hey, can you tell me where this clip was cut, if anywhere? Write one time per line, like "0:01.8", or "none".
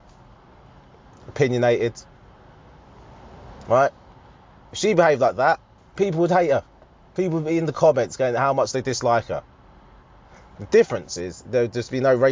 0:05.8